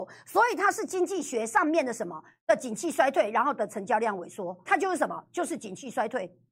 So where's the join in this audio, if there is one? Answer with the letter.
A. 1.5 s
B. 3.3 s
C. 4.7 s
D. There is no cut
C